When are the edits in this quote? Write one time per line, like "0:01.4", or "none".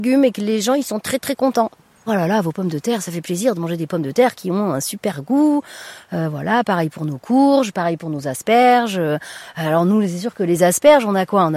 0:02.1